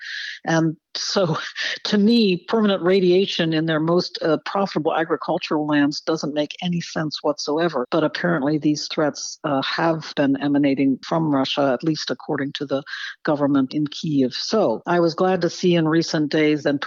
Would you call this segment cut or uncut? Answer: cut